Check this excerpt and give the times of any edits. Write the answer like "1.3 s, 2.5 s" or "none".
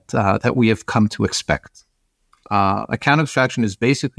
2.4 s